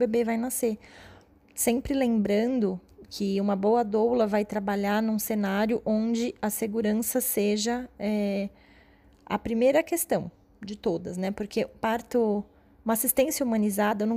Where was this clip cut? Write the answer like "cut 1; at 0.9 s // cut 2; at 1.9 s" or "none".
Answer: cut 1; at 1.3 s